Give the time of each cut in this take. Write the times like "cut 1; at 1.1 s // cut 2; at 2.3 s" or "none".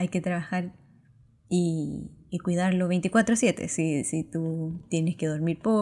none